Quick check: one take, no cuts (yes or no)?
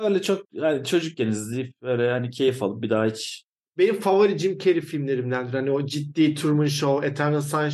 yes